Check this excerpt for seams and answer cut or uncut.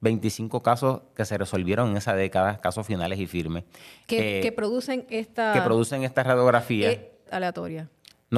cut